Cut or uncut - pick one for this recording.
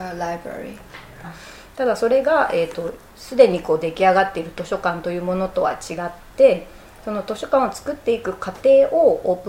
cut